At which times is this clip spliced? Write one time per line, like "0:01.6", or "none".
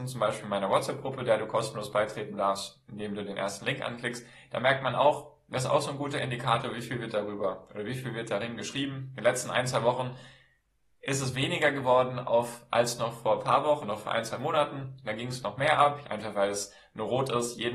0:13.8
0:16.0